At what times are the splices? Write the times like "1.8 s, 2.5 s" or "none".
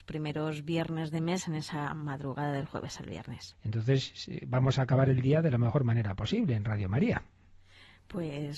3.5 s